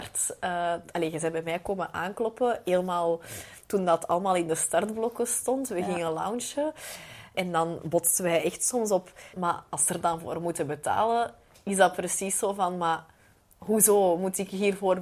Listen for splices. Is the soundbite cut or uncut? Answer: cut